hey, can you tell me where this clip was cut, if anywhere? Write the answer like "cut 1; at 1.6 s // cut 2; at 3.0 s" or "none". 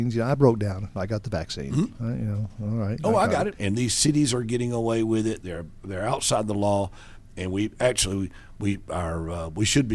cut 1; at 3.6 s